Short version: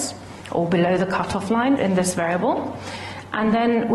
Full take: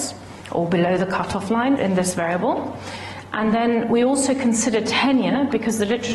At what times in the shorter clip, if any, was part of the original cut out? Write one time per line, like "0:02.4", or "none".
none